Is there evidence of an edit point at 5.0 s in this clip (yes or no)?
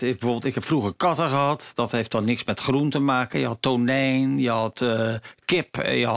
no